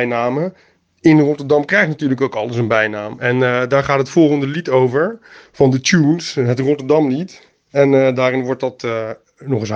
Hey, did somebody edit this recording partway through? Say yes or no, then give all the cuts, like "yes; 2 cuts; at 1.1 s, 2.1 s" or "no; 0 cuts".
no; 0 cuts